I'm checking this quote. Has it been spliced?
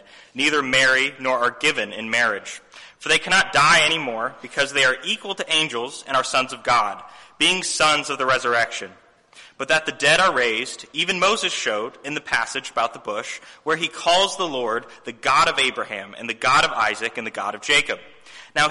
no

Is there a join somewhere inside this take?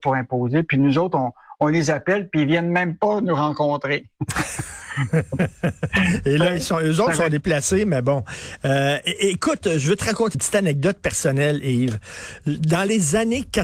yes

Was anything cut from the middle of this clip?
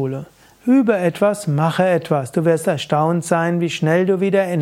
no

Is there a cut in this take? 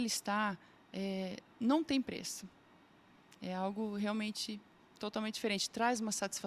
no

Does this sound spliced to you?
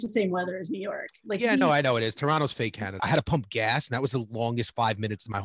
yes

